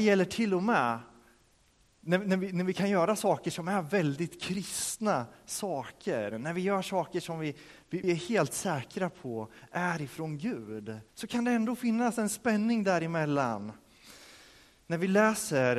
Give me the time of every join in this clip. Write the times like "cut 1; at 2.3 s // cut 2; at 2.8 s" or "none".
cut 1; at 8.0 s // cut 2; at 11.1 s